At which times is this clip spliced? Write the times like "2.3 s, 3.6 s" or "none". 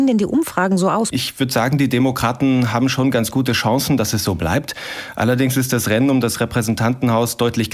1.1 s